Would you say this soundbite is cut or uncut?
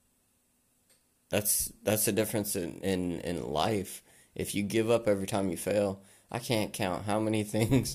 uncut